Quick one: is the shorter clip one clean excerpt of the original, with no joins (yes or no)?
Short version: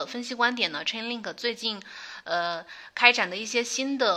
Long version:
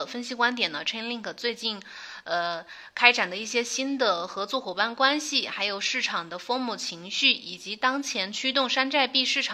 yes